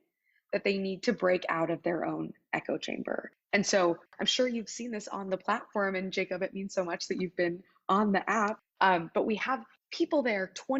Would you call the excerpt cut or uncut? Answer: uncut